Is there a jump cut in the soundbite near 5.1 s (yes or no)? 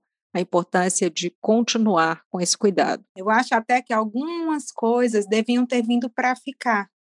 no